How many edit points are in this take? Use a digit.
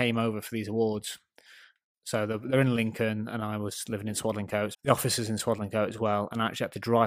1